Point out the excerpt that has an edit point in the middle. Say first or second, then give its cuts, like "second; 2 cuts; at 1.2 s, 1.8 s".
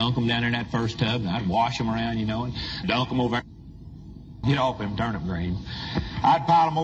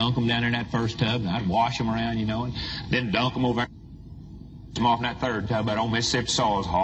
first; 2 cuts; at 2.8 s, 4.4 s